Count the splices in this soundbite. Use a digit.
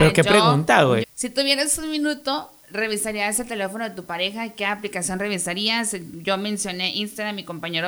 1